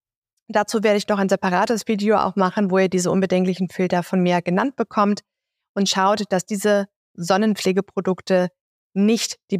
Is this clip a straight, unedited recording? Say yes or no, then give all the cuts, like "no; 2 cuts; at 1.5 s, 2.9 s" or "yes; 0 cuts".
yes; 0 cuts